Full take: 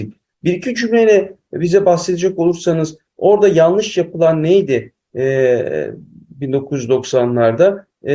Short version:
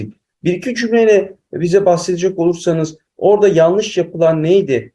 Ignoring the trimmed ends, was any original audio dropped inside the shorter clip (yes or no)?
no